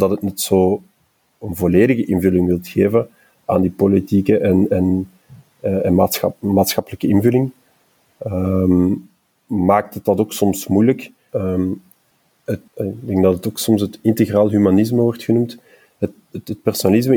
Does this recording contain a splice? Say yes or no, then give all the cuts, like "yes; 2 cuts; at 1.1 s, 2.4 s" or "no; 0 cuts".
yes; 2 cuts; at 11.3 s, 12.7 s